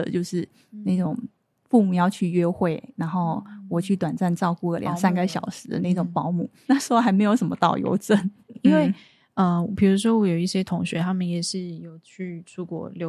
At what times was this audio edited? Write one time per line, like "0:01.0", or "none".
0:06.6
0:08.5